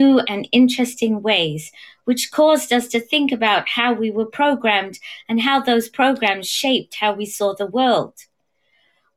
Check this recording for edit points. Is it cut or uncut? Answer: uncut